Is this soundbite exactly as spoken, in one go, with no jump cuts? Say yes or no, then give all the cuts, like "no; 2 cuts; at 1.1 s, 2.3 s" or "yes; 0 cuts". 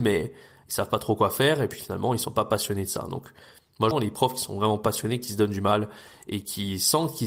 no; 1 cut; at 3.9 s